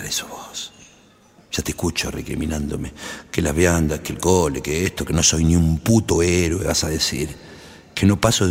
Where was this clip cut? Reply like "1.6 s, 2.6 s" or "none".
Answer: 5.1 s